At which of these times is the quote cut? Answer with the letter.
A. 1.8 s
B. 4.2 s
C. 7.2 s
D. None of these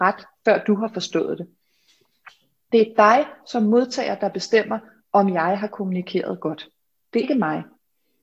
C